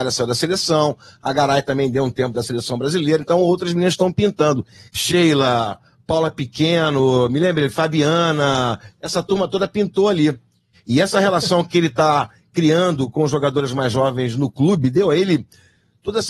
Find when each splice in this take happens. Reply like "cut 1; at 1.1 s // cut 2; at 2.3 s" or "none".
cut 1; at 4.9 s // cut 2; at 10.7 s

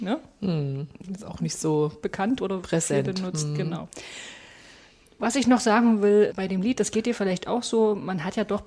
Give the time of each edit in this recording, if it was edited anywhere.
cut 1; at 6.3 s

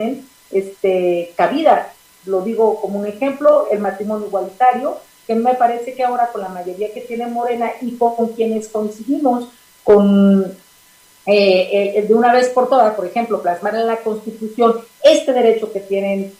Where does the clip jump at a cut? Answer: none

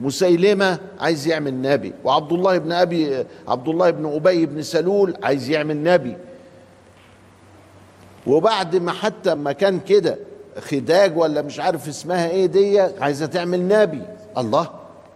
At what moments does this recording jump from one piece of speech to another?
cut 1; at 9.4 s

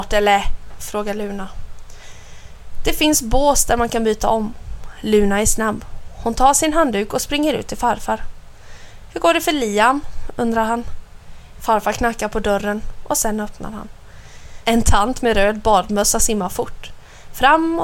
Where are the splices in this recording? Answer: cut 1; at 11.5 s // cut 2; at 14.6 s

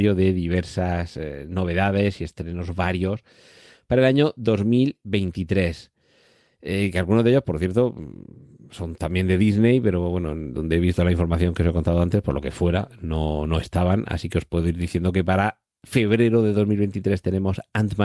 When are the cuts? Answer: none

